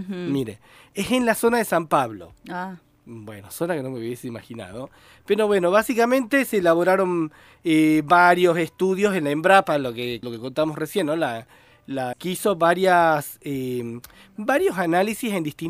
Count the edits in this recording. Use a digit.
2